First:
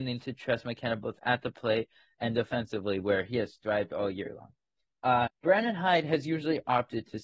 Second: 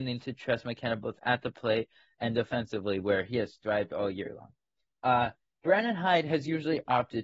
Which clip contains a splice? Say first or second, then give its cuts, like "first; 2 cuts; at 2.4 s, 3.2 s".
first; 1 cut; at 5.3 s